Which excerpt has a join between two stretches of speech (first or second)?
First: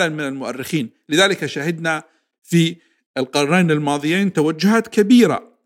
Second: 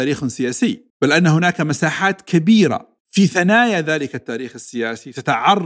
second